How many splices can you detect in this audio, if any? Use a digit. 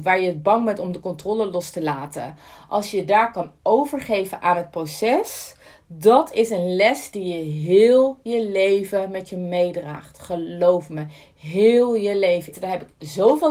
1